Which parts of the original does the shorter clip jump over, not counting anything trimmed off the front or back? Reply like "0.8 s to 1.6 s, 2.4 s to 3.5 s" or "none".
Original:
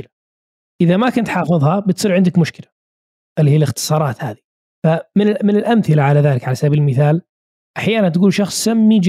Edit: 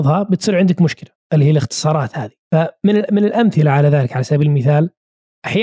2.8 s to 3.3 s, 4.5 s to 4.7 s